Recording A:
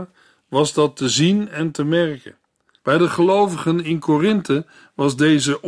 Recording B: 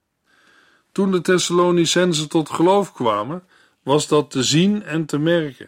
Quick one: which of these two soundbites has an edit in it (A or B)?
A